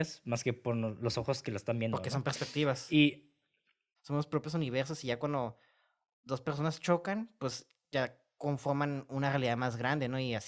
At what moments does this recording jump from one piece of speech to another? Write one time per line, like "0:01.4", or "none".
0:04.0